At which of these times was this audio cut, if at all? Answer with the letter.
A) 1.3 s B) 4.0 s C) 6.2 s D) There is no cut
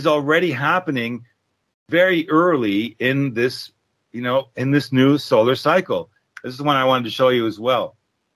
C